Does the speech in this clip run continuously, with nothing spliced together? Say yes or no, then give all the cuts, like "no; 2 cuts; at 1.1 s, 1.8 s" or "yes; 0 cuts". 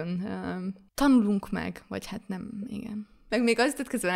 yes; 0 cuts